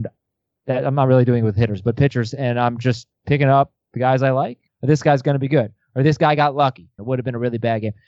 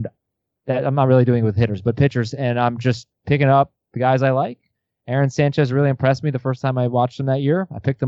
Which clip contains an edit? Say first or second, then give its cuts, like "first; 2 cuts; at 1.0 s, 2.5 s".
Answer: first; 2 cuts; at 4.7 s, 7.0 s